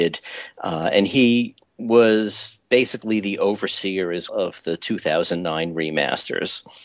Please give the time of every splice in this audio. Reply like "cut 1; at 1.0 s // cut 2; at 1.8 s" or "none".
cut 1; at 4.3 s